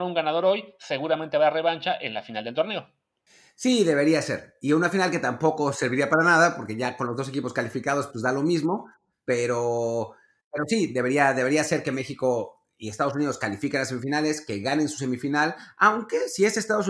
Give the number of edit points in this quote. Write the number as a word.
zero